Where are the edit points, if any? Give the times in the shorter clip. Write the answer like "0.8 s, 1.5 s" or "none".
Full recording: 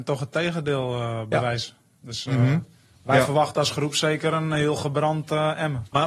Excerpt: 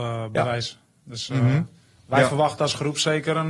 none